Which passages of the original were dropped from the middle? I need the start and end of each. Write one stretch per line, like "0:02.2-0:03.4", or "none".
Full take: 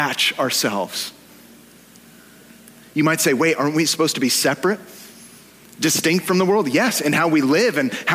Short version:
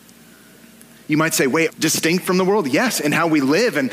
0:03.6-0:05.7